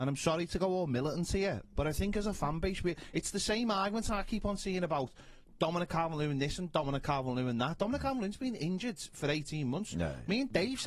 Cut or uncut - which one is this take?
uncut